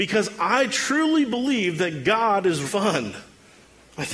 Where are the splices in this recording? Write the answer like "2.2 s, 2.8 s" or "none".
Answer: 2.6 s